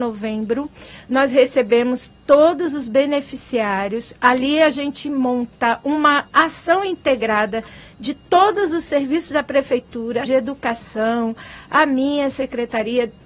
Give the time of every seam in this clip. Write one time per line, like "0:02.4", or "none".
0:10.3
0:11.6